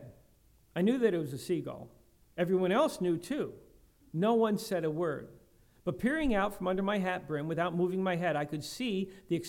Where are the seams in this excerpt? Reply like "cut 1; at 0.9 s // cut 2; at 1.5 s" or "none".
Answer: cut 1; at 2.2 s